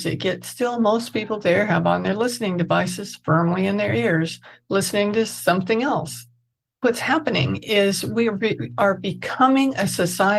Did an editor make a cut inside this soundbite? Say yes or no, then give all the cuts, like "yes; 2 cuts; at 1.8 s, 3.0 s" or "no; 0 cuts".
no; 0 cuts